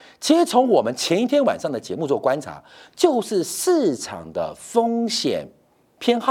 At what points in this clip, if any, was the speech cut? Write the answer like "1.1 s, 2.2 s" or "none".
none